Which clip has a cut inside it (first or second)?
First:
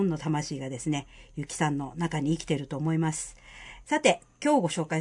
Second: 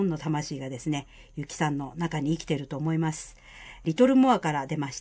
first